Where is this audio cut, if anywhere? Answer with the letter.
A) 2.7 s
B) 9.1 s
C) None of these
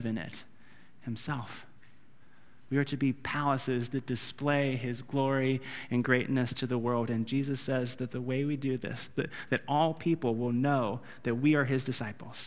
A